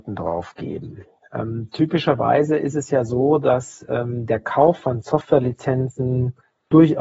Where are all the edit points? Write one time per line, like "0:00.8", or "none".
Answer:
none